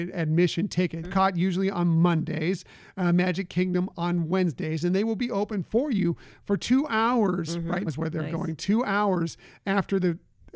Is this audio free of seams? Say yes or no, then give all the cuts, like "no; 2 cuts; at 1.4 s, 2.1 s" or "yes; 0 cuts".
no; 2 cuts; at 1.0 s, 7.9 s